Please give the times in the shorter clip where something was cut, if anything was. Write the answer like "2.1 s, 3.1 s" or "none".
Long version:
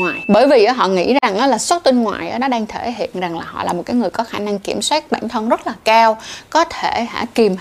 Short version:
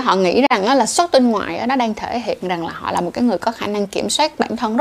none